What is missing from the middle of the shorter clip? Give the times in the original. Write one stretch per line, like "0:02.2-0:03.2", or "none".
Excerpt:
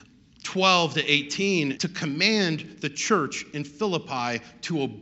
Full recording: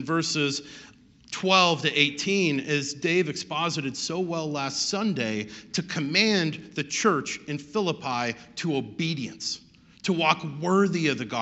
0:02.6-0:05.7